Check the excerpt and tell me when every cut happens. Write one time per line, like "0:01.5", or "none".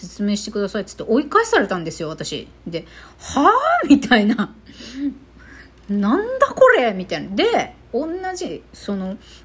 none